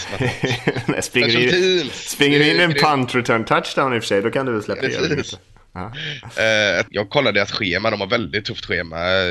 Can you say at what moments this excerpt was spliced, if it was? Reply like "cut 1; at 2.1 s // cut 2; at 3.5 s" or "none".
cut 1; at 4.8 s // cut 2; at 6.9 s